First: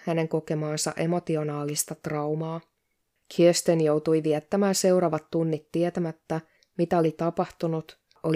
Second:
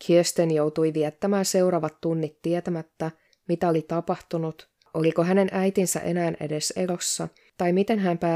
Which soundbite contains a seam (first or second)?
first